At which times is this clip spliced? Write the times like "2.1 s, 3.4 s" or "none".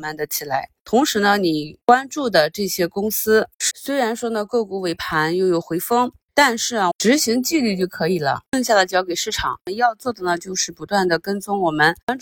3.7 s, 6.9 s